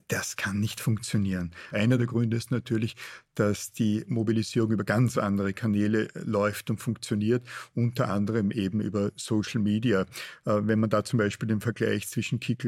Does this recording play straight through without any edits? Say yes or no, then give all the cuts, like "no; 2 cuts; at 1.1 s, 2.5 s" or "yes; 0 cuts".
no; 1 cut; at 1.7 s